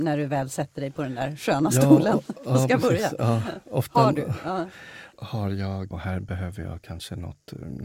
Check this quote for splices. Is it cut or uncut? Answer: cut